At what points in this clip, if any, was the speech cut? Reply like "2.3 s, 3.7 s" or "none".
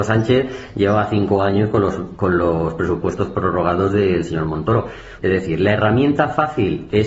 5.2 s